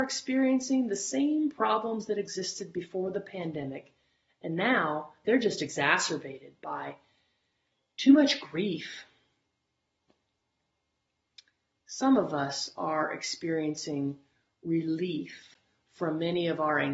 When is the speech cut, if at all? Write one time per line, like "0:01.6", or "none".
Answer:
none